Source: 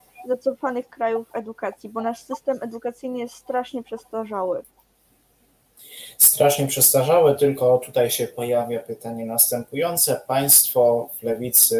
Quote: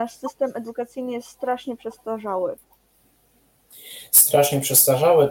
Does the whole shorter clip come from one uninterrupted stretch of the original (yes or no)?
yes